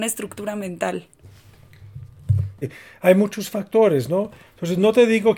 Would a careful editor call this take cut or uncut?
cut